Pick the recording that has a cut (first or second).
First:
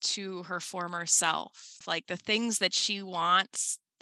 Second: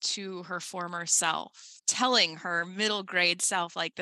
first